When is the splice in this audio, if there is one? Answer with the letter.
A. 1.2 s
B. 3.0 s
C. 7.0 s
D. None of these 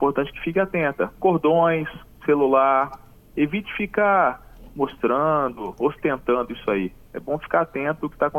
D